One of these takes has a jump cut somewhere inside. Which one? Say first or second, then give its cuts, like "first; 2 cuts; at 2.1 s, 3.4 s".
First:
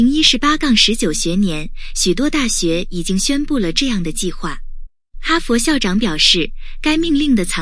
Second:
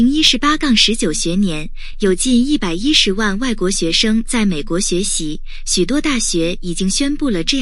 first; 1 cut; at 1.9 s